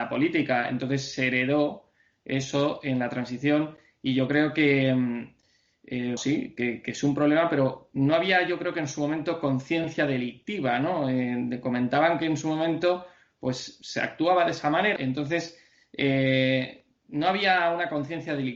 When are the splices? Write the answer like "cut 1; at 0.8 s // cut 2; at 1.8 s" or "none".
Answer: cut 1; at 6.2 s // cut 2; at 15.0 s